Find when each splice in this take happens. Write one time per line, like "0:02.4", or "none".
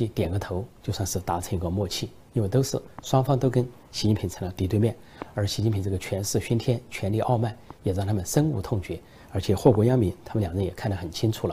none